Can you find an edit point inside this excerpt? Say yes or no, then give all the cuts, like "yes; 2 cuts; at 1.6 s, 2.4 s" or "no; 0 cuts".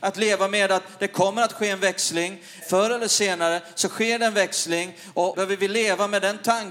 yes; 2 cuts; at 2.6 s, 5.3 s